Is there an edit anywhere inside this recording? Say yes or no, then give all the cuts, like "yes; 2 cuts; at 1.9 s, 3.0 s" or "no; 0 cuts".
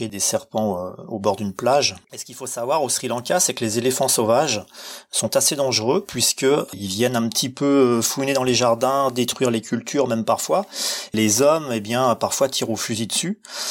yes; 1 cut; at 2.0 s